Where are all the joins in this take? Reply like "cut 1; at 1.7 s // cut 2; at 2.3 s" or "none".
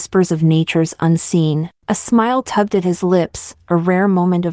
cut 1; at 1.8 s